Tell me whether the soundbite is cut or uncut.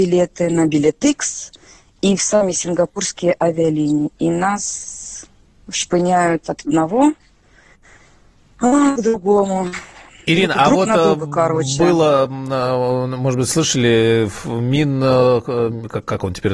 uncut